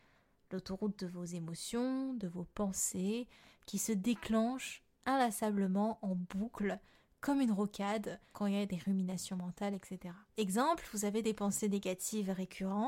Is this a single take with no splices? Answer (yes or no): no